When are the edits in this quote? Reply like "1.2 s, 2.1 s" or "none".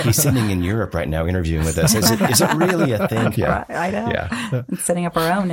3.3 s

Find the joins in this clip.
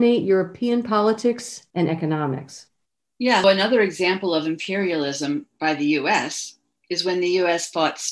1.7 s, 3.4 s

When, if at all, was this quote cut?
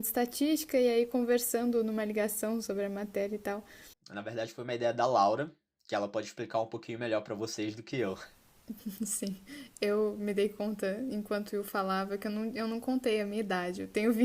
3.9 s

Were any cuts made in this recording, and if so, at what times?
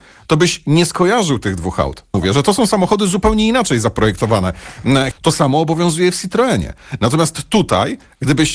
2.1 s, 5.1 s

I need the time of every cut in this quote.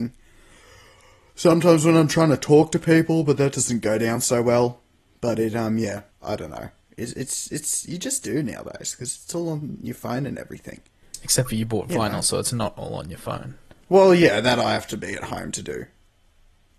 6.1 s

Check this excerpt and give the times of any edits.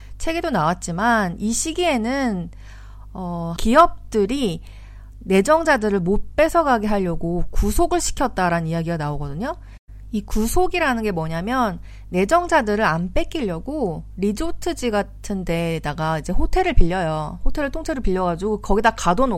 3.6 s

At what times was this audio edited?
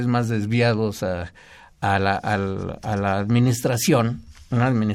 none

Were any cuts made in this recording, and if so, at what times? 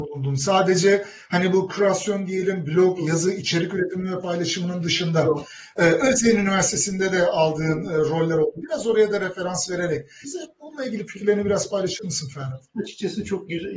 10.2 s

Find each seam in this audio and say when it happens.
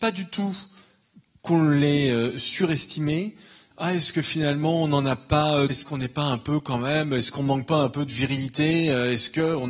3.7 s, 5.7 s

